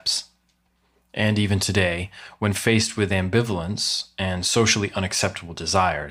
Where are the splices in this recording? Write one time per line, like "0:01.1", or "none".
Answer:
none